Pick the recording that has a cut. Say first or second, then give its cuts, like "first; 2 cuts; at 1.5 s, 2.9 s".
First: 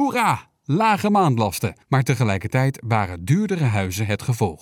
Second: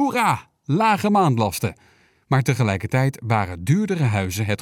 first; 1 cut; at 1.8 s